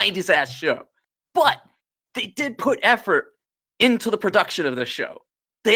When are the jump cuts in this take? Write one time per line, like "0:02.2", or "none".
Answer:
none